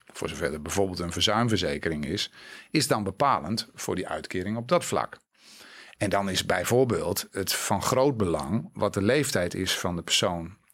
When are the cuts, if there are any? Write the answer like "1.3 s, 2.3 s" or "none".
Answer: 6.0 s